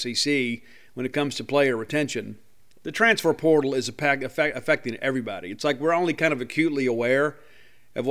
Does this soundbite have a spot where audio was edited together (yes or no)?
no